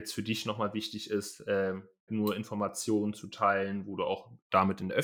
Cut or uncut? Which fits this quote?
cut